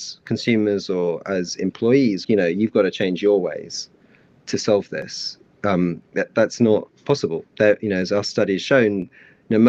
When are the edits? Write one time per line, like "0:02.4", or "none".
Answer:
0:02.2